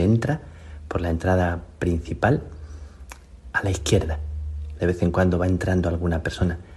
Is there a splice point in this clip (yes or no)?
yes